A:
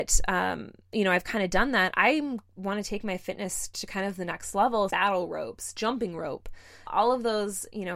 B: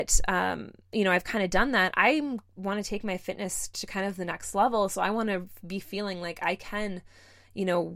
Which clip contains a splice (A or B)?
A